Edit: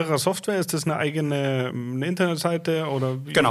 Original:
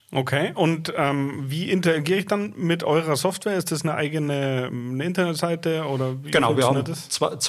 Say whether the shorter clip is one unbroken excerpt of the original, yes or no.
yes